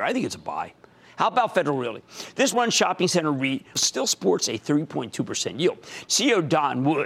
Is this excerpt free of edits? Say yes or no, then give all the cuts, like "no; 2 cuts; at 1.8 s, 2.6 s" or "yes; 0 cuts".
no; 3 cuts; at 2.5 s, 3.8 s, 6.1 s